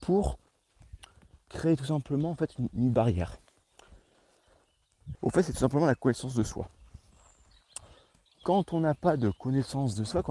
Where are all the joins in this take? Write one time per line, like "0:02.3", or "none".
0:05.1

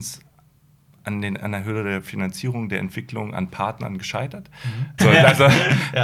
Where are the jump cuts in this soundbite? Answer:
0:05.0

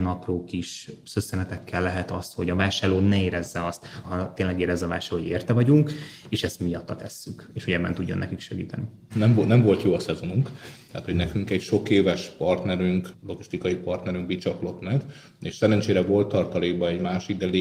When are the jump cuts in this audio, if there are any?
0:04.0
0:09.1

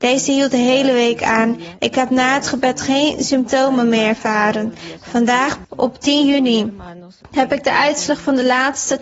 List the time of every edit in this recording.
0:05.6

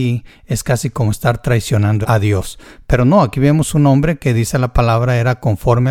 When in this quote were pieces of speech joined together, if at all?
0:02.0

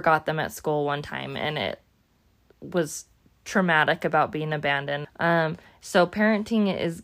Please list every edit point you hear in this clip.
0:05.0

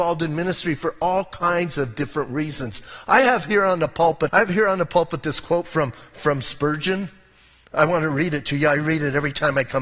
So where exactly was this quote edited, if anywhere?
0:04.3

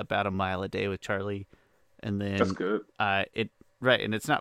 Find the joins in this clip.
none

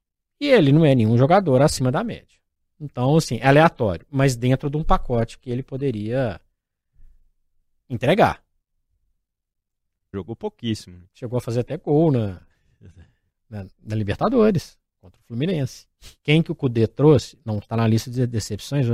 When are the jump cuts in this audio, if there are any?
0:10.1
0:13.7
0:16.2

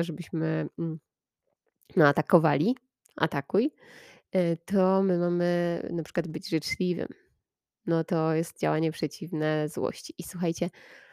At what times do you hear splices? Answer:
none

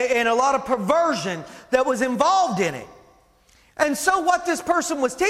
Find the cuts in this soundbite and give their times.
none

